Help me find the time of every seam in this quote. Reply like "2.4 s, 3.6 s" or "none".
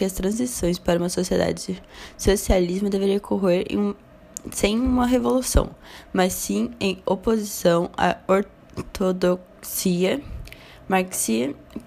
none